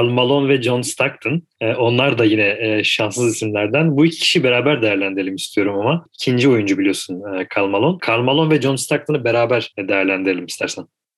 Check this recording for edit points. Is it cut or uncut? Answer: cut